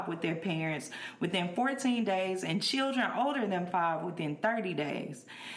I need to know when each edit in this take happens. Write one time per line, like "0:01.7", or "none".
none